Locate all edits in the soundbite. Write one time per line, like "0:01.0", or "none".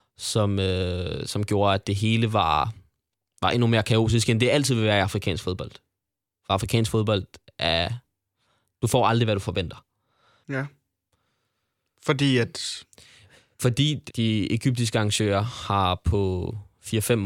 0:10.4
0:14.1